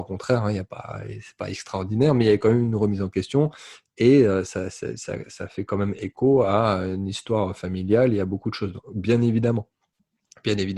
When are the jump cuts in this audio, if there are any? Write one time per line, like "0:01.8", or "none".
none